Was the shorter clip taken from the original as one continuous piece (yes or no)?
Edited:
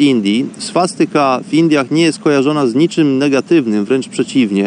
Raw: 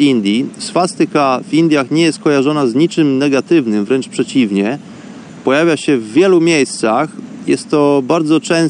yes